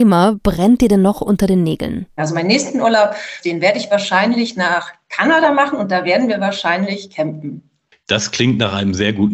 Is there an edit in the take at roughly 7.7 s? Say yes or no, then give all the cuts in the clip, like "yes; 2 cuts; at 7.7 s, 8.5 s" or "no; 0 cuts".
no; 2 cuts; at 2.2 s, 3.4 s